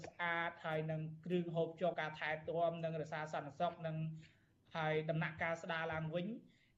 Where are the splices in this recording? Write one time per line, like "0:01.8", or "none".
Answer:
0:01.9